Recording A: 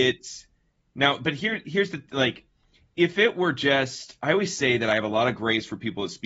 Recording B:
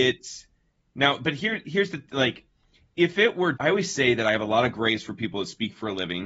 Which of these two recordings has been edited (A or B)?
B